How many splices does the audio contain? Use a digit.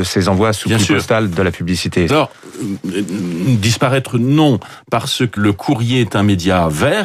2